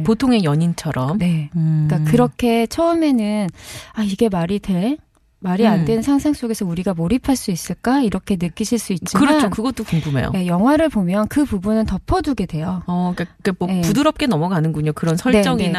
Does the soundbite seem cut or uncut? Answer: uncut